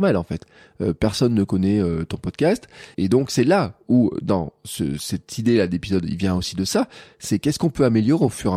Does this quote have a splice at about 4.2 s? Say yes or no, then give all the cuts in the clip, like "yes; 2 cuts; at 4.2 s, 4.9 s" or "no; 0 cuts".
no; 1 cut; at 2.9 s